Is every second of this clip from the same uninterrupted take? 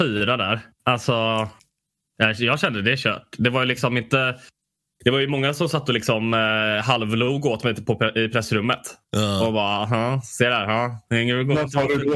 yes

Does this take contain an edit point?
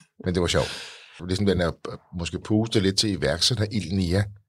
yes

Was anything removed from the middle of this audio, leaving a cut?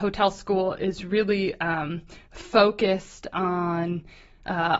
no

